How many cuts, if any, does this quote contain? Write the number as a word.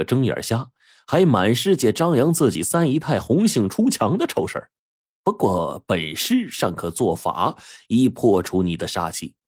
one